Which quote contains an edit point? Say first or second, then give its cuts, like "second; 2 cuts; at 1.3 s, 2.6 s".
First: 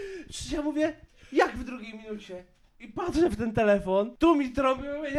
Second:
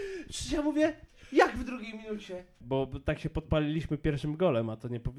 second; 1 cut; at 2.6 s